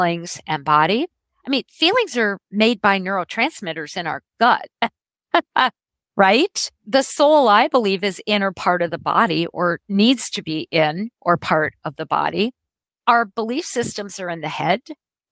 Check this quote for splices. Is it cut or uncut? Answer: uncut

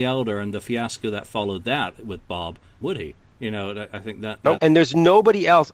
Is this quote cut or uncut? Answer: cut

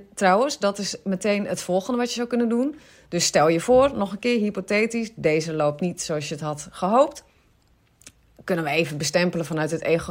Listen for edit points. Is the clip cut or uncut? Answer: uncut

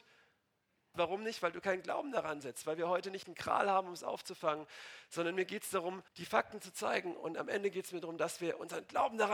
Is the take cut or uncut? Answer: cut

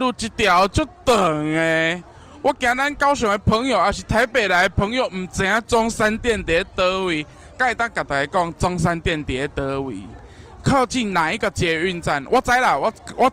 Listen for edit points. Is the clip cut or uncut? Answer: uncut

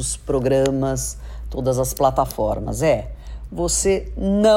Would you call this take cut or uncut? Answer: uncut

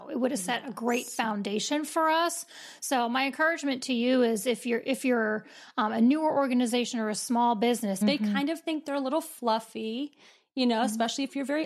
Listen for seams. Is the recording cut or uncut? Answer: cut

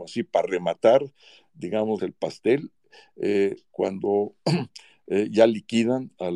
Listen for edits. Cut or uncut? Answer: cut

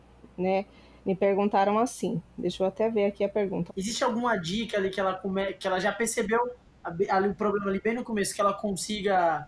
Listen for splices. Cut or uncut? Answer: cut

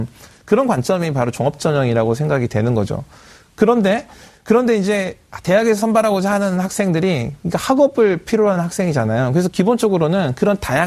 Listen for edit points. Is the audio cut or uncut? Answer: uncut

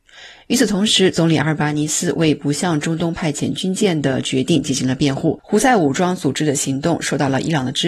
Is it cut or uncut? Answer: cut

